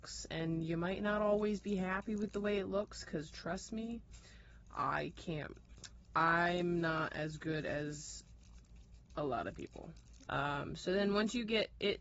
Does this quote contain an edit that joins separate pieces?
yes; 1 cut; at 10.3 s

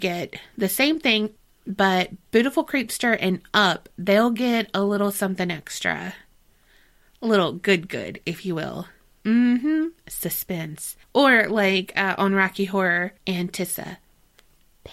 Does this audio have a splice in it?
yes; 3 cuts; at 9.2 s, 11.0 s, 13.2 s

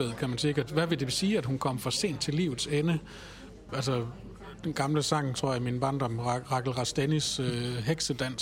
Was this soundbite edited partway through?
yes; 2 cuts; at 3.7 s, 5.3 s

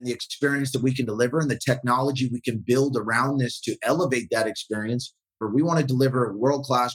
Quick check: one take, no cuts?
no; 1 cut; at 5.4 s

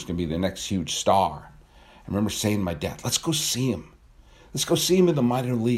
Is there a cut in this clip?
no; 0 cuts

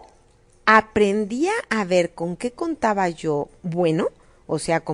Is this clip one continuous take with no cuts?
yes; 0 cuts

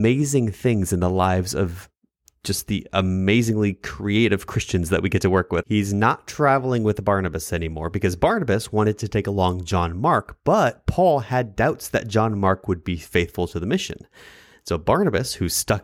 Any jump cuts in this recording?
yes; 1 cut; at 5.6 s

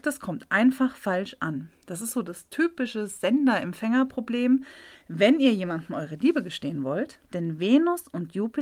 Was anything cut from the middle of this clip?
yes; 2 cuts; at 5.0 s, 7.2 s

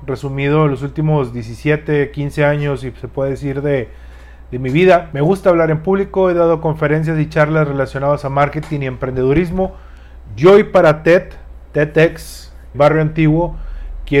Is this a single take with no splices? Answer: no; 1 cut; at 12.7 s

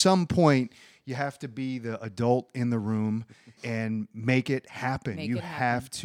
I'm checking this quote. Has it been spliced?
yes; 1 cut; at 3.6 s

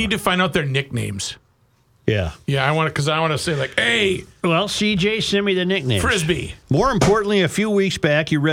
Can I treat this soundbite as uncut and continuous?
no; 1 cut; at 6.6 s

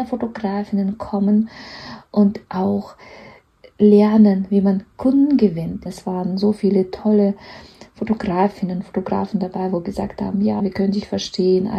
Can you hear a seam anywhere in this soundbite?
yes; 2 cuts; at 5.9 s, 10.6 s

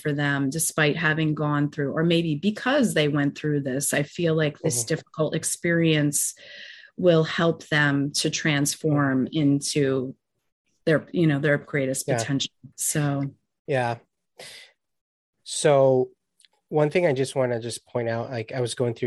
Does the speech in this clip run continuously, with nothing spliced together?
no; 1 cut; at 12.7 s

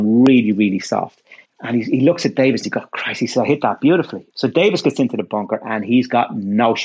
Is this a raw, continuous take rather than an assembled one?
no; 2 cuts; at 1.4 s, 4.3 s

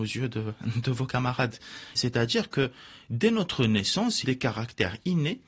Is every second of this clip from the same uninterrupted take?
no; 2 cuts; at 1.9 s, 4.2 s

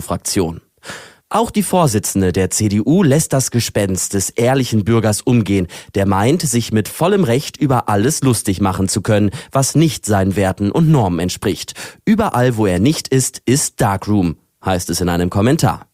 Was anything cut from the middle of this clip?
no; 0 cuts

